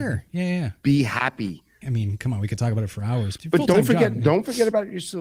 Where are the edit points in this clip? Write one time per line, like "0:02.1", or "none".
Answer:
0:01.8
0:03.4